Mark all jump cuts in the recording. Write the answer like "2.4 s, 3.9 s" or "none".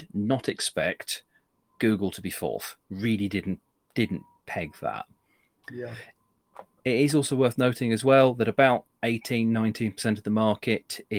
none

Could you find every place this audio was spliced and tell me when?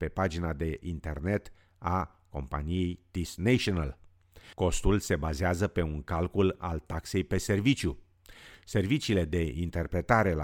4.5 s

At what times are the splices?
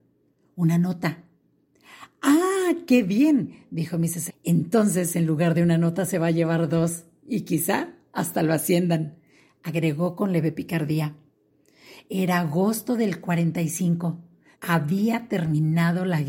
4.3 s, 14.5 s

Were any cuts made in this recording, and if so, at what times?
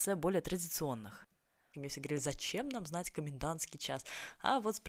1.7 s

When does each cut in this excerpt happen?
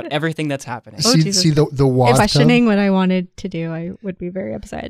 2.2 s

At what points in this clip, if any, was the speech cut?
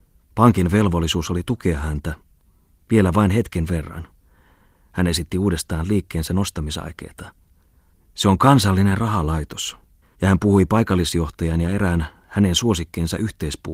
7.9 s, 10.0 s

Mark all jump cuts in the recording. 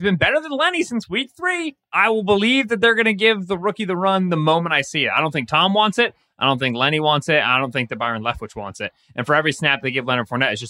none

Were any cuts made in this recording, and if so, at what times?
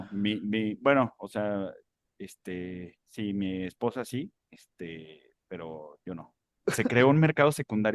4.4 s, 6.6 s

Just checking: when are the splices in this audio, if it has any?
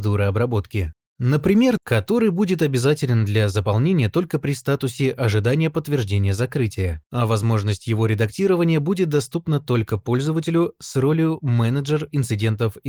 1.8 s

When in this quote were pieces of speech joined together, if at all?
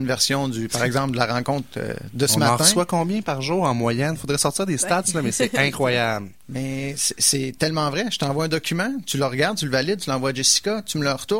none

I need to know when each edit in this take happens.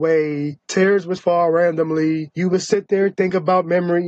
1.2 s

